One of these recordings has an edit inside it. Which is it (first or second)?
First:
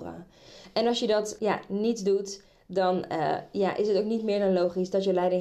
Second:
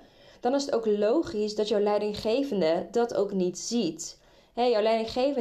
first